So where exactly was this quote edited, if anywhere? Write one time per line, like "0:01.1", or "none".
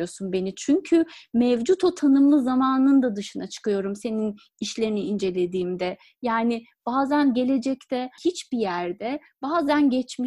0:08.2